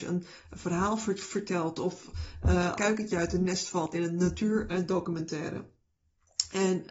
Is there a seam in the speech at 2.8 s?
yes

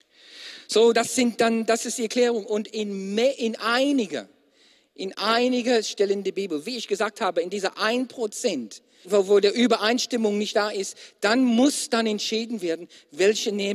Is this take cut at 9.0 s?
yes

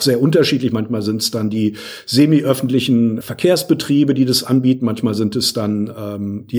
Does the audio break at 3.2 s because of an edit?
yes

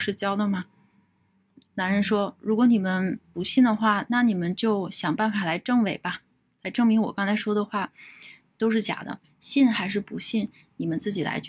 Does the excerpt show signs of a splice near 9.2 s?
yes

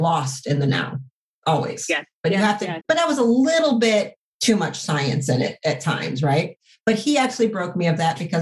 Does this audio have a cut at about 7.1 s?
no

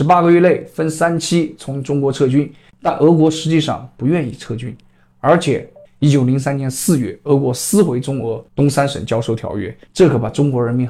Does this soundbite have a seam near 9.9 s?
yes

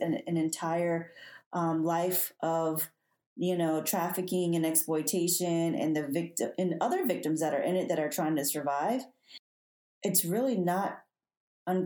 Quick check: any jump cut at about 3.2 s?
no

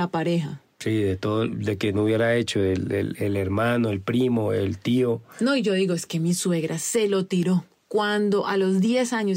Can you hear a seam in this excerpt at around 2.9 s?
no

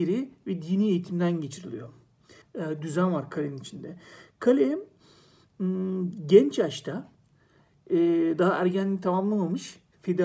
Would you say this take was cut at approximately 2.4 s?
yes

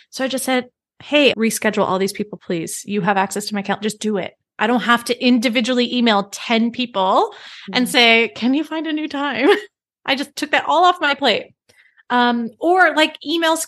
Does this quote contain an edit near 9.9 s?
no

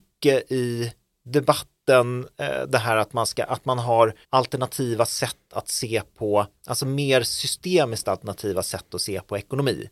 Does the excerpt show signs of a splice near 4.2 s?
yes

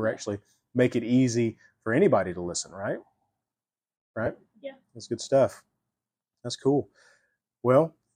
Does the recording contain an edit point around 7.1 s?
no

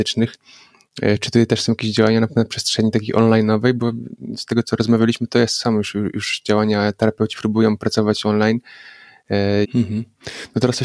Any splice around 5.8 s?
no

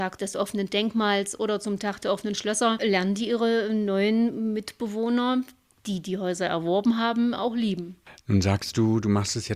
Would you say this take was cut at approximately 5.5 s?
no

